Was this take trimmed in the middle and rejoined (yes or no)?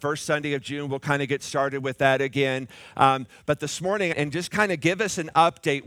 yes